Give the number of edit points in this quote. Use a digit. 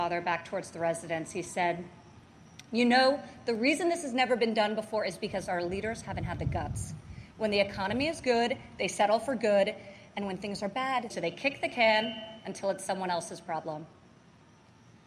1